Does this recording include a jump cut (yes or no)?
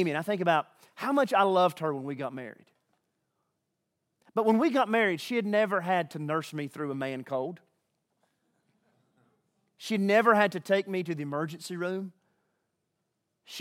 no